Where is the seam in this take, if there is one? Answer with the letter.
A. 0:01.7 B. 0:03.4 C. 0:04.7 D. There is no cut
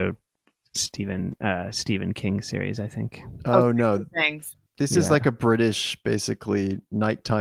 C